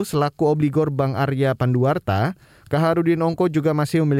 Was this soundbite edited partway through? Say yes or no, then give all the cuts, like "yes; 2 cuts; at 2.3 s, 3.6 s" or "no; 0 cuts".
no; 0 cuts